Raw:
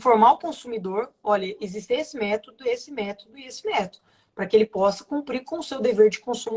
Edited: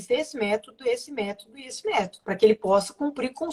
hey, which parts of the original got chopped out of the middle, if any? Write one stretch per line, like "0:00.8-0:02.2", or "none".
0:04.0-0:04.3